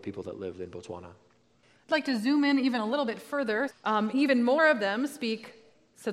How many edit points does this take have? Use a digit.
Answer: 1